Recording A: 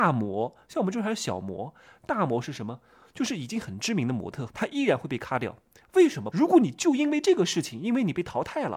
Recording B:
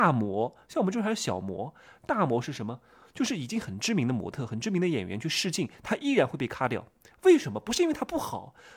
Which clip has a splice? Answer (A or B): A